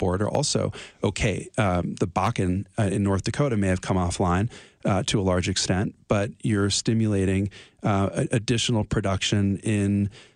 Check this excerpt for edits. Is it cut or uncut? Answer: uncut